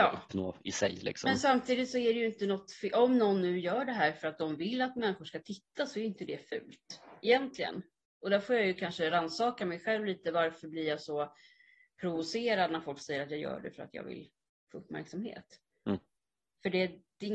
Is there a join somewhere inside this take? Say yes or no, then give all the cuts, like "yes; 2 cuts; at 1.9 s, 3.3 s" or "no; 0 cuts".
no; 0 cuts